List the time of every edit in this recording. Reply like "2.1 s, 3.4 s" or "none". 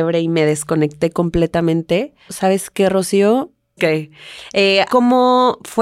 2.3 s, 3.8 s, 4.9 s